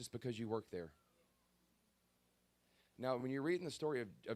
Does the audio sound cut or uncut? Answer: uncut